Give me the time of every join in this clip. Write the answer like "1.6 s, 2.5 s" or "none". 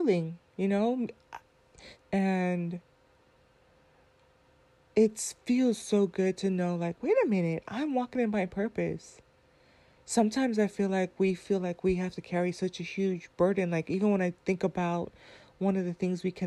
2.0 s